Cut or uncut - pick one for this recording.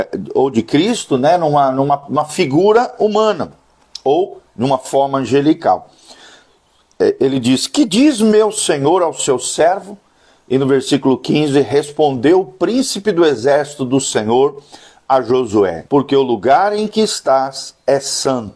cut